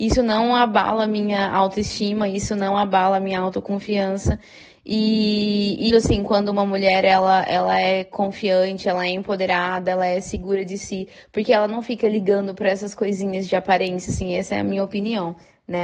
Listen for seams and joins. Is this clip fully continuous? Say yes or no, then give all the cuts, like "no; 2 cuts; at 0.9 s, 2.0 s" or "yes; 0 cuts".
no; 1 cut; at 5.9 s